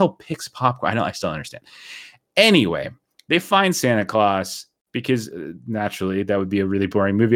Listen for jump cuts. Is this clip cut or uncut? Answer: uncut